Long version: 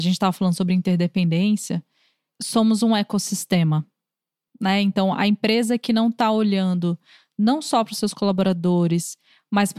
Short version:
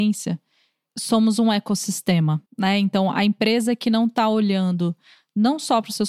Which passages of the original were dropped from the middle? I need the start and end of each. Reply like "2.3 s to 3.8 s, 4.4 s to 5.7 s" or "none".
3.9 s to 4.5 s